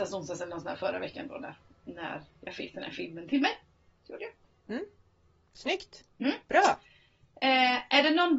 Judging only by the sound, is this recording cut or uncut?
uncut